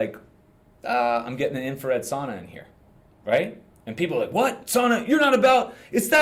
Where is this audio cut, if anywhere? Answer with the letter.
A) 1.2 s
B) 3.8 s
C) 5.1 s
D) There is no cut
D